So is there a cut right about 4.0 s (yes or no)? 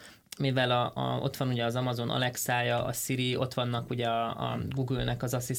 no